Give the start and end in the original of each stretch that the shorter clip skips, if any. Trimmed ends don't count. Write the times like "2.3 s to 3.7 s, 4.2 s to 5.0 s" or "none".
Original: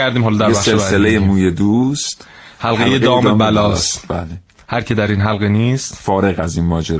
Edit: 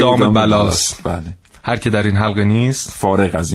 none